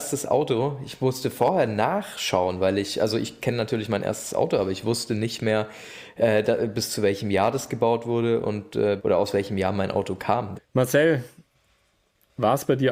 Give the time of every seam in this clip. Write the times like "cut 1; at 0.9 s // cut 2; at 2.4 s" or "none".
cut 1; at 9.0 s // cut 2; at 10.5 s